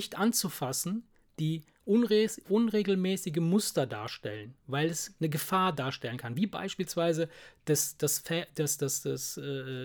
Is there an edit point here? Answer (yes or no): no